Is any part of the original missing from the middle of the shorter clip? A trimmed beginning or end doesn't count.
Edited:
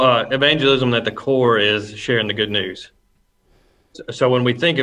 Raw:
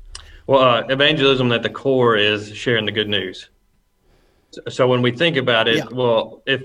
no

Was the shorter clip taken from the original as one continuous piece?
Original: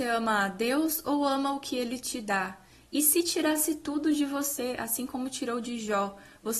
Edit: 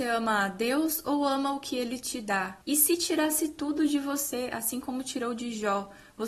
no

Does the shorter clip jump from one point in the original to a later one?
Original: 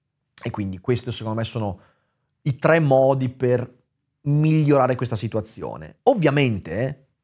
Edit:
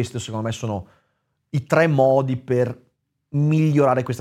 no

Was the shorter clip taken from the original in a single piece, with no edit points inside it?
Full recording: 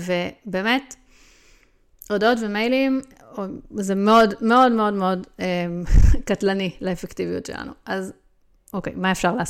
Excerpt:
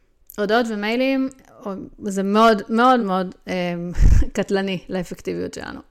no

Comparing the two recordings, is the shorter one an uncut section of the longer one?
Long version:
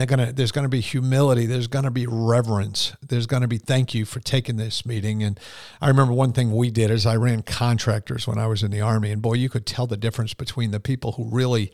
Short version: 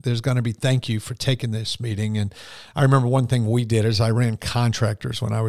yes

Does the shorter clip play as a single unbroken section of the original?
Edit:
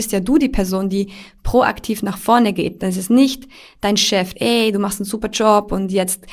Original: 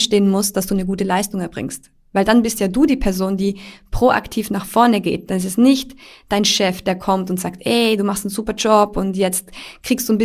no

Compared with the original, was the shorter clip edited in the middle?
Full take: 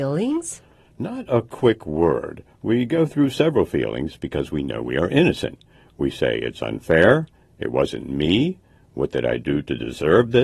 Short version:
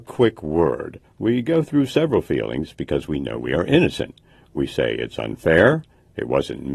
no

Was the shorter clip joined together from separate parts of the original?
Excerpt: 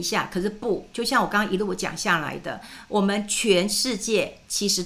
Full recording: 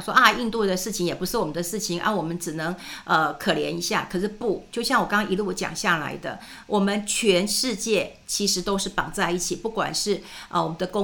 no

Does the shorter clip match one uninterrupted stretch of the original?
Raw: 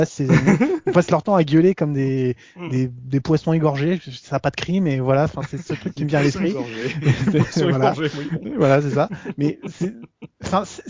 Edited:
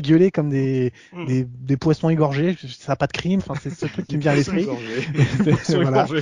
no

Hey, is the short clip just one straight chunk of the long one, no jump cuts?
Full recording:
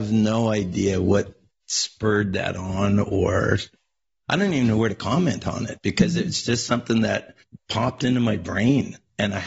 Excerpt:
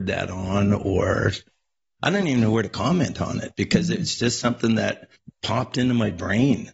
yes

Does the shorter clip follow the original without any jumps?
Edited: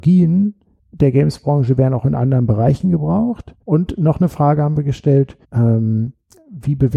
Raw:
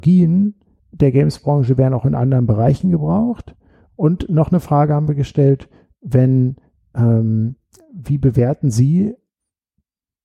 no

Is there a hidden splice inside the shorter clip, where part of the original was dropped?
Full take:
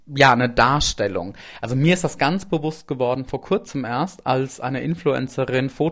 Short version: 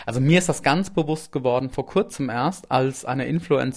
no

